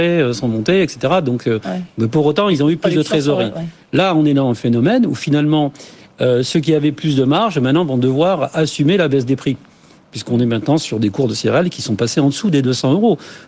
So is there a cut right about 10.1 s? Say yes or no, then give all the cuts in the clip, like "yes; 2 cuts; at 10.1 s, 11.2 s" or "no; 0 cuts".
no; 0 cuts